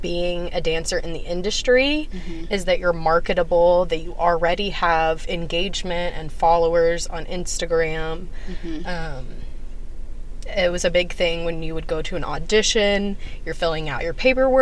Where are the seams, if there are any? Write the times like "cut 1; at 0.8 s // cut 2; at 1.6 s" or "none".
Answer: none

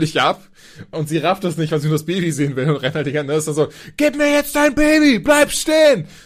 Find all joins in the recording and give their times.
cut 1; at 0.9 s

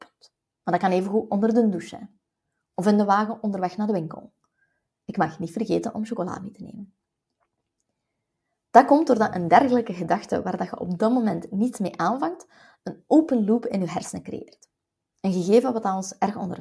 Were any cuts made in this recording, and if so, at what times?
none

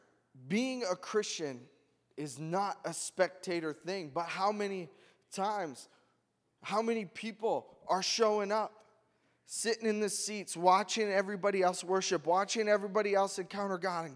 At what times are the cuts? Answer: none

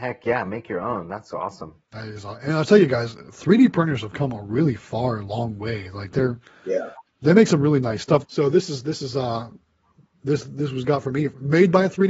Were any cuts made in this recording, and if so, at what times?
cut 1; at 8.2 s

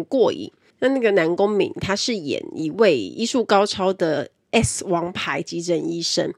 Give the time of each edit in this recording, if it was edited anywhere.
none

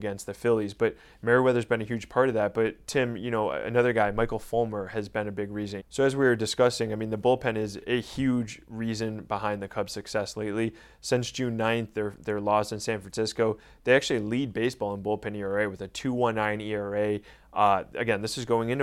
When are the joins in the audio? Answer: cut 1; at 5.8 s

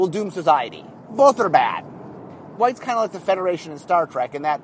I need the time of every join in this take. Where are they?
cut 1; at 1.1 s // cut 2; at 2.6 s

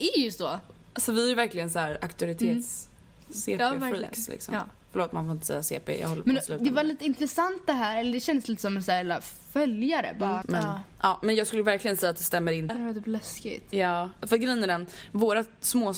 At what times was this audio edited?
cut 1; at 10.4 s // cut 2; at 12.7 s // cut 3; at 14.2 s

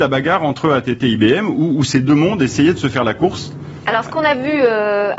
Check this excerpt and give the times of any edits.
none

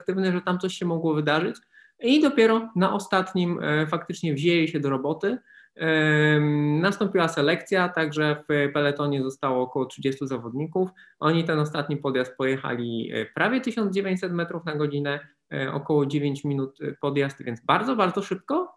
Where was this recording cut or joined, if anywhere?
none

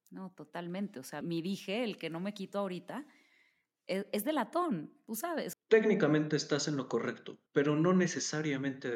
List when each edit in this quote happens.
cut 1; at 1.2 s // cut 2; at 5.5 s // cut 3; at 7.5 s

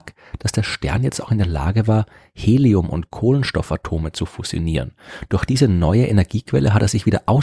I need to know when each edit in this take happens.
none

